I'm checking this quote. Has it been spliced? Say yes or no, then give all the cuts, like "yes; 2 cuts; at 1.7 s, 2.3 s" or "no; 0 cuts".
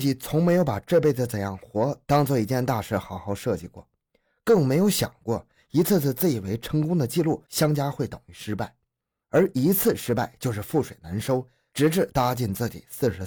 no; 0 cuts